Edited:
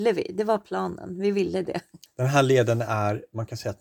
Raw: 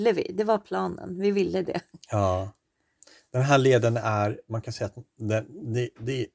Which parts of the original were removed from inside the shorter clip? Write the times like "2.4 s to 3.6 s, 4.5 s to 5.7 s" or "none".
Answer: 2.1 s to 3.2 s